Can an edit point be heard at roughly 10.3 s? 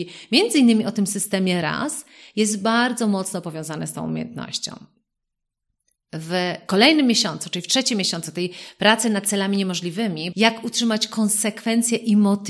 yes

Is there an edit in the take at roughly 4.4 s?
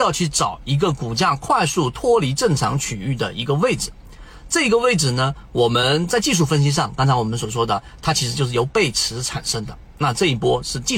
no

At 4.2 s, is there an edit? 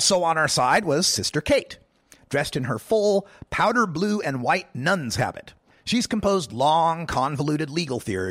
no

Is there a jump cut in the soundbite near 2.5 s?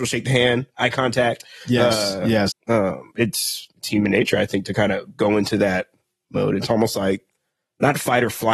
yes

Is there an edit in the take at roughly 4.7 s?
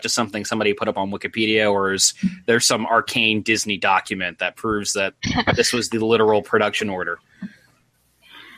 no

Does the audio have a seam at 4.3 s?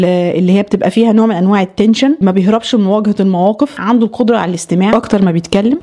no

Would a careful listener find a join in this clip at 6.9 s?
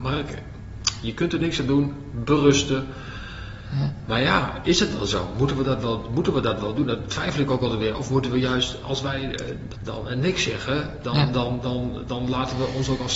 no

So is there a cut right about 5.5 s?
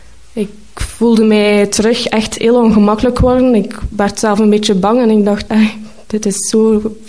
yes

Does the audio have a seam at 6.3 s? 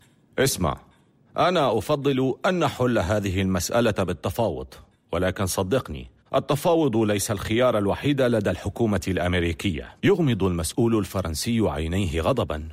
yes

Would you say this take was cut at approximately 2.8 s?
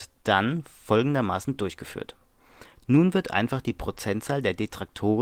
yes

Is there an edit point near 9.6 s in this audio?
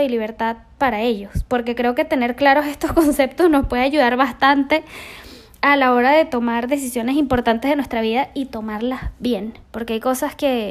yes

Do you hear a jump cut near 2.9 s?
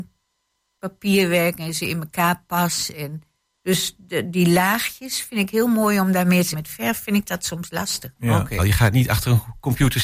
no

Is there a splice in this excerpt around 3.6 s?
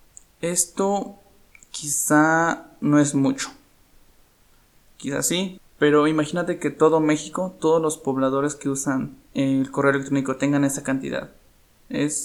no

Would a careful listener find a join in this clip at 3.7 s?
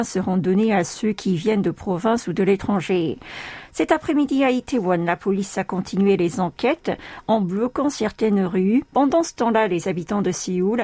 no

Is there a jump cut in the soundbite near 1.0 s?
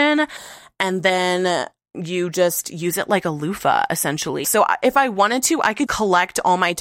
no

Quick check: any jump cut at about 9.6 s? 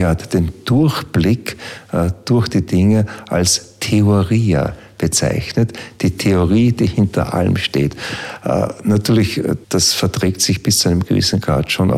yes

